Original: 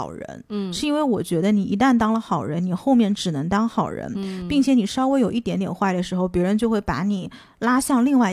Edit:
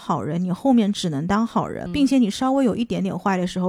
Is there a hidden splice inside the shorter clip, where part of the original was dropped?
yes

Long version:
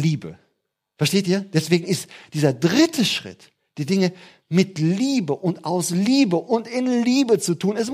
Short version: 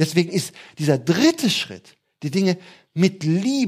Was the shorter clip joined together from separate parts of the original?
no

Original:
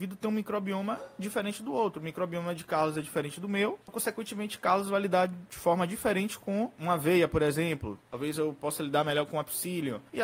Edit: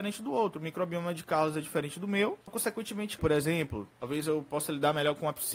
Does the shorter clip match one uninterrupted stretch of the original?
no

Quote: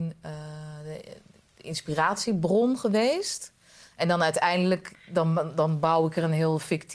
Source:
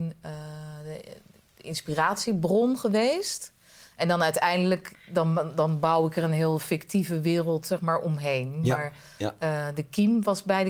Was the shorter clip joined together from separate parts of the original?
no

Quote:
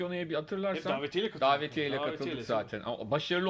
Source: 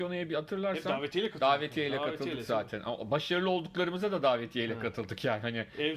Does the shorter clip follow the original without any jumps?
yes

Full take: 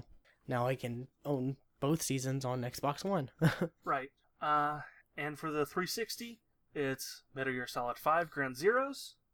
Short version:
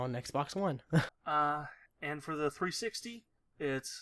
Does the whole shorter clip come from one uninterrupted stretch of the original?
no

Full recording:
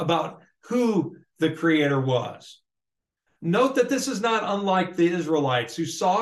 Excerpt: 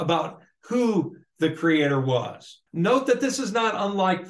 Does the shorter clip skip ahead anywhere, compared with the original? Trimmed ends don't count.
yes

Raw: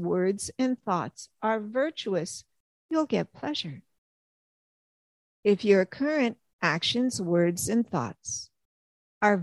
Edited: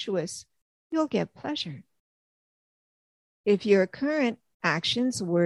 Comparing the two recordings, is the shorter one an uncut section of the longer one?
yes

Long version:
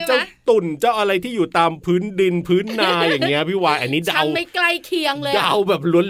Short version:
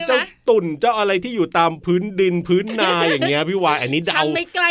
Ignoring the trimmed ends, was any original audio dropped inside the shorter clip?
no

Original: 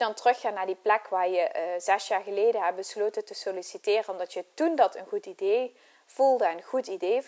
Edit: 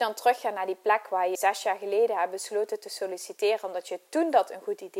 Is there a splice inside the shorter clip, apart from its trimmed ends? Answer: yes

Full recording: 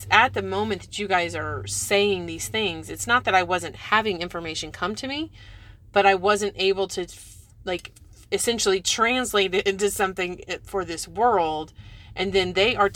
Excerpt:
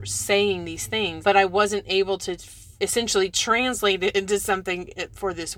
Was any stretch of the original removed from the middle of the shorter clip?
yes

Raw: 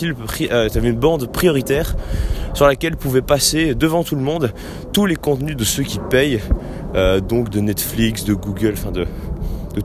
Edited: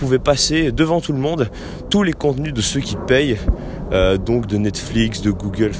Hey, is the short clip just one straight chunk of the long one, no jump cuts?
yes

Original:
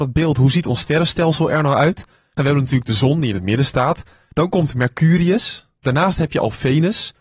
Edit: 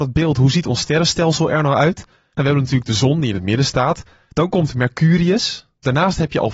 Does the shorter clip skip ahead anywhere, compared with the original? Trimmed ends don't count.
no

